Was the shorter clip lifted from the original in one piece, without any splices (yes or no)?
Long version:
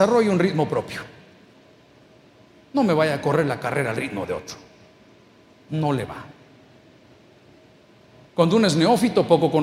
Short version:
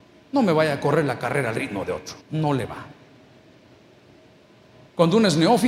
no